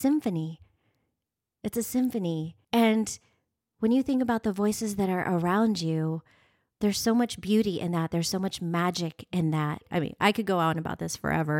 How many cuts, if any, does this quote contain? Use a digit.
1